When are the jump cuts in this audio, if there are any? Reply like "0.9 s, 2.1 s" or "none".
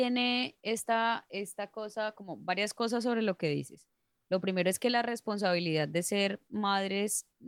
none